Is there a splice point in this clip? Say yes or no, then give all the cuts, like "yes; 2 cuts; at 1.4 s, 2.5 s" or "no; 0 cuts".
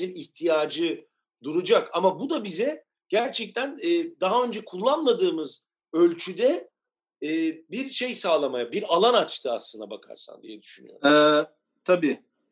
no; 0 cuts